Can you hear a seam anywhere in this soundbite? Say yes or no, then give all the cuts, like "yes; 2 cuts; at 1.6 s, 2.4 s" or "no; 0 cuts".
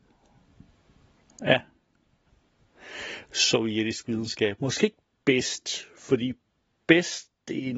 yes; 1 cut; at 4.6 s